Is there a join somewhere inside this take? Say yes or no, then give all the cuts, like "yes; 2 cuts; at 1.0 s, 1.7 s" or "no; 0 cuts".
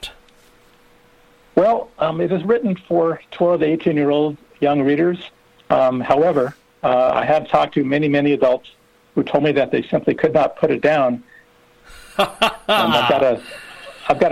yes; 1 cut; at 11.4 s